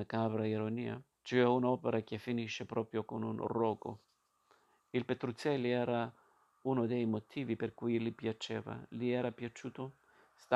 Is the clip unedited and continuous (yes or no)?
no